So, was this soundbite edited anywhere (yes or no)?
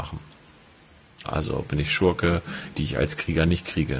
yes